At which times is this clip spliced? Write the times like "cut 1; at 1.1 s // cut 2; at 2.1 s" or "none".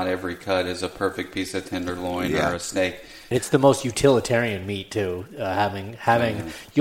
cut 1; at 3.3 s